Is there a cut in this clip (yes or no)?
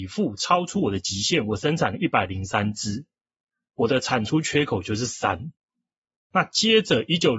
yes